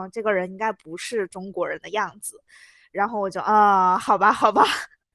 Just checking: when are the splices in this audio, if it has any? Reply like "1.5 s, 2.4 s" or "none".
none